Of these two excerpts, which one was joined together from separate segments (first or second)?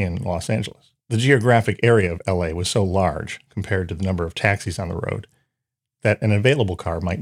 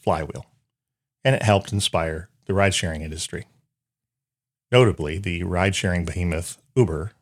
first